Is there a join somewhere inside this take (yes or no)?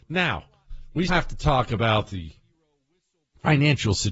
yes